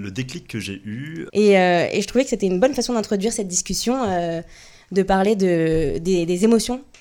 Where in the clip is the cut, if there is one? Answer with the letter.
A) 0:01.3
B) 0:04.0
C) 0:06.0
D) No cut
A